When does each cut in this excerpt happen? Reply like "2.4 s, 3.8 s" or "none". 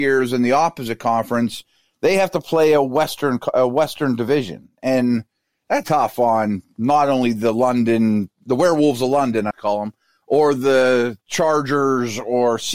5.8 s, 9.5 s, 11.2 s